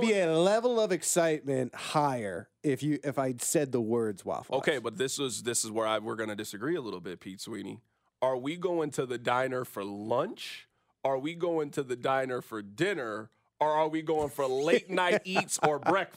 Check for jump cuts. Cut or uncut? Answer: uncut